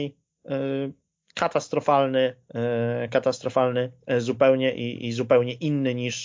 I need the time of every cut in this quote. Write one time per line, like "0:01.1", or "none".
none